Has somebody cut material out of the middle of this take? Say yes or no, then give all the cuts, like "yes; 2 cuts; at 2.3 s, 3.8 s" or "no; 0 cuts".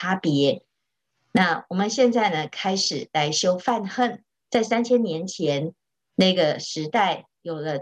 yes; 1 cut; at 4.3 s